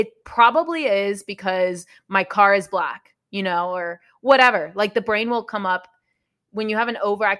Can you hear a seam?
no; 0 cuts

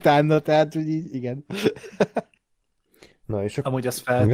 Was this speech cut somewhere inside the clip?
no; 0 cuts

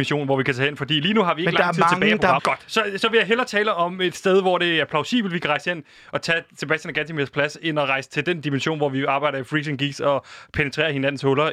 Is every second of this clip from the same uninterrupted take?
no; 1 cut; at 2.4 s

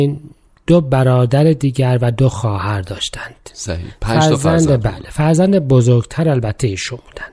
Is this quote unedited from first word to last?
yes; 0 cuts

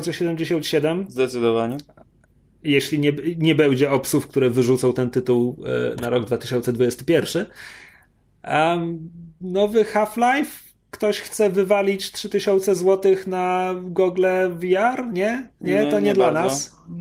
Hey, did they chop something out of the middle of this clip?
no; 0 cuts

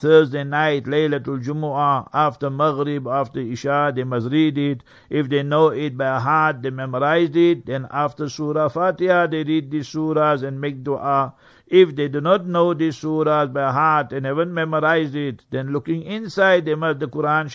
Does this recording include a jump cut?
no; 0 cuts

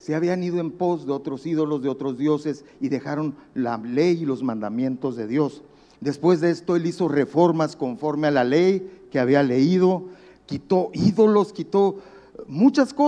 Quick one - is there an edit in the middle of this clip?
yes; 2 cuts; at 5.9 s, 11.5 s

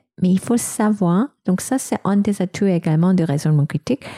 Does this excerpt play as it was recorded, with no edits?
yes; 0 cuts

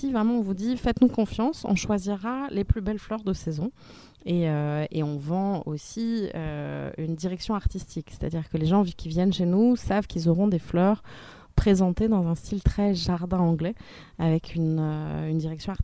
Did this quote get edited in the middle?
no; 0 cuts

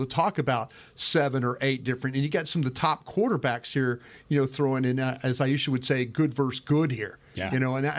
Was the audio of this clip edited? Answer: no; 0 cuts

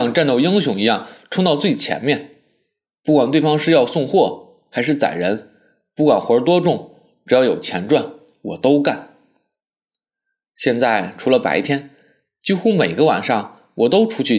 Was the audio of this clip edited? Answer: no; 0 cuts

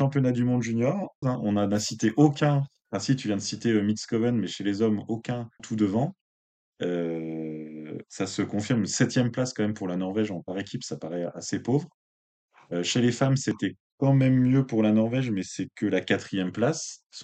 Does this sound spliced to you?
yes; 2 cuts; at 1.2 s, 5.6 s

